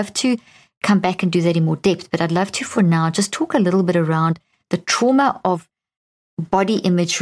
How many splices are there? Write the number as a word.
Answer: zero